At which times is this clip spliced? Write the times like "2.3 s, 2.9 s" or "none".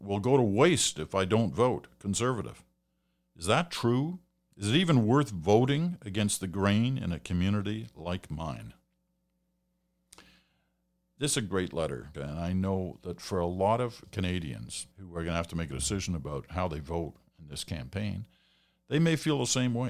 12.1 s, 14.9 s